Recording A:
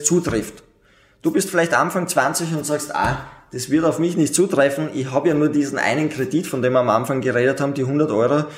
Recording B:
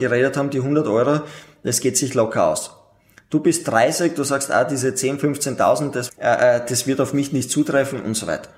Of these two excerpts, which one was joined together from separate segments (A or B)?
B